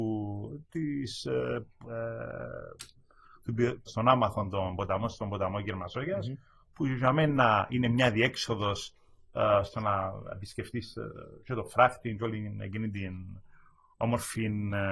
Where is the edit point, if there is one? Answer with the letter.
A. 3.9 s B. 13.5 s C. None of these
A